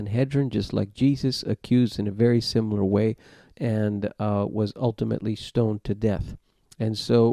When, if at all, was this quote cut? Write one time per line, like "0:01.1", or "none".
0:03.5